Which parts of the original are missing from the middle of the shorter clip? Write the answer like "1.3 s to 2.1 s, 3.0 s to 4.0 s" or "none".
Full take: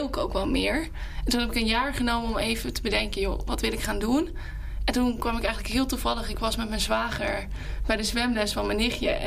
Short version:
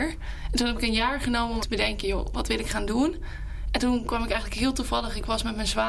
2.3 s to 2.7 s